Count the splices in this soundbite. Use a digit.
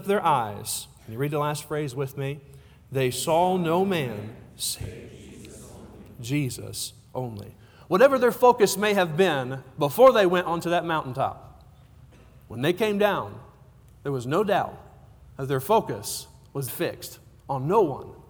1